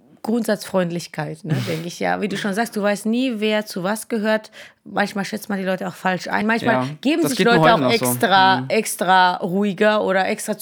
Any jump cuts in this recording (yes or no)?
no